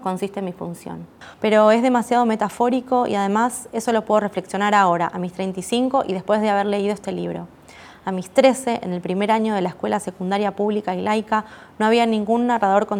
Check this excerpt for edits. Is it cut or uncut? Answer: cut